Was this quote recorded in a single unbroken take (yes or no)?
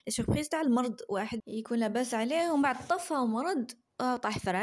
no